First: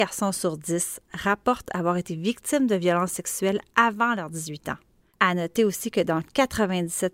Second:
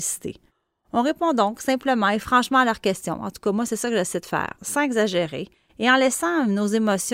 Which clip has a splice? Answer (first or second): second